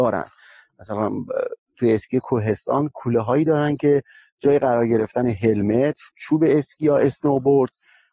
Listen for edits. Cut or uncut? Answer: cut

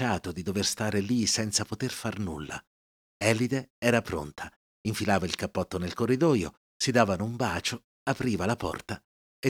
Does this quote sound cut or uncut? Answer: uncut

